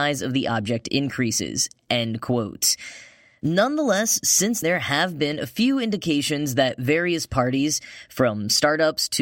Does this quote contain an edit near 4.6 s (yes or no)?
yes